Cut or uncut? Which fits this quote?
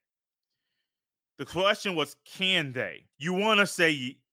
cut